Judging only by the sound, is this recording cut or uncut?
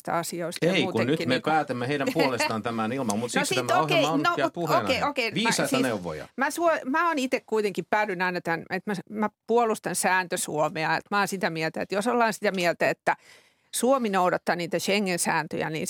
cut